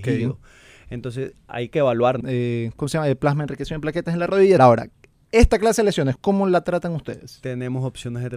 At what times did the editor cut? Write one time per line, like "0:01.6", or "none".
0:02.2
0:04.6
0:06.2